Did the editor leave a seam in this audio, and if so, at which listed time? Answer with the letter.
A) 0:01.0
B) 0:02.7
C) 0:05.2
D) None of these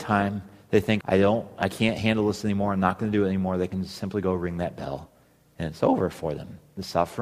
A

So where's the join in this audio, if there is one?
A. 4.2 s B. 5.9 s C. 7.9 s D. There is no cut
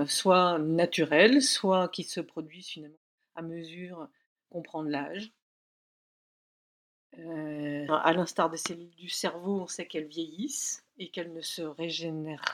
C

